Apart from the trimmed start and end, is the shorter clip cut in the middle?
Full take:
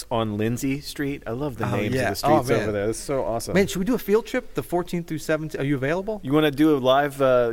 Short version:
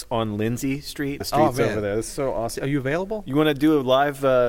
yes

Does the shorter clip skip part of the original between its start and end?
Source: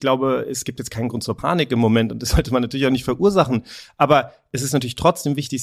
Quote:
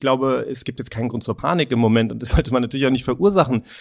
no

